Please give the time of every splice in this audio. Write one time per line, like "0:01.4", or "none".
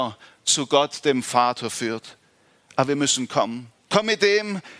0:03.9

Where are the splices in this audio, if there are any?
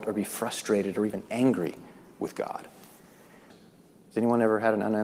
0:03.5

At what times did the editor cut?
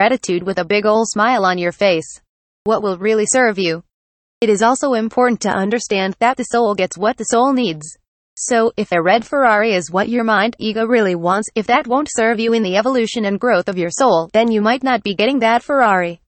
none

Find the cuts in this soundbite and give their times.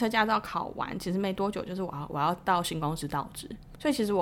none

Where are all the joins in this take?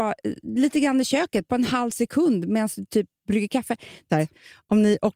0:01.5
0:04.1

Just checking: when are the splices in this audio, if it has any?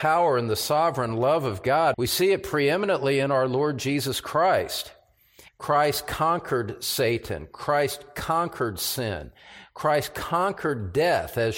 0:01.9
0:05.5

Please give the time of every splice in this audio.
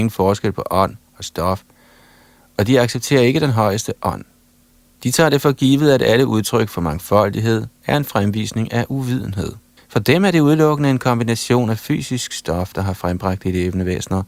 0:04.9
0:09.8

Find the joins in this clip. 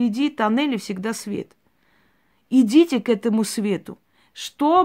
none

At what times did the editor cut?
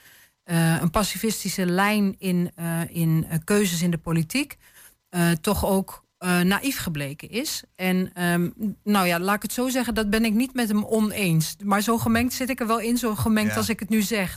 0:02.9

